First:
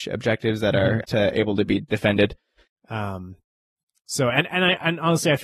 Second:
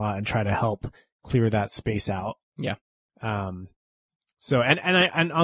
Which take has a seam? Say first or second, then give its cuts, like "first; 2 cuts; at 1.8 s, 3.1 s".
first; 2 cuts; at 1.0 s, 2.7 s